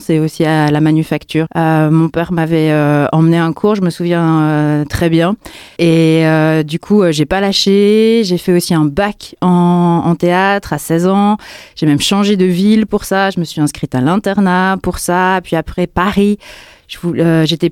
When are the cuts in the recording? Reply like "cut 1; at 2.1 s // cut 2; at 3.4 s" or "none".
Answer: cut 1; at 1.5 s // cut 2; at 5.8 s